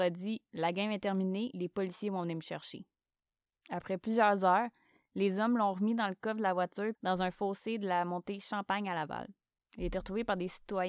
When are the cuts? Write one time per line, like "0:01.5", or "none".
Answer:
0:06.9